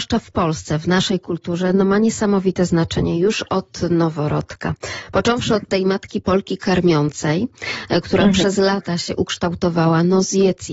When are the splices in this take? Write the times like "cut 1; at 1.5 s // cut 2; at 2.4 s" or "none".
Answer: none